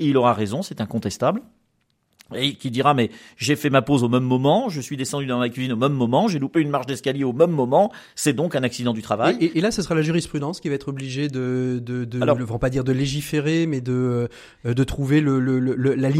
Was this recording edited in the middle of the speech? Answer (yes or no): no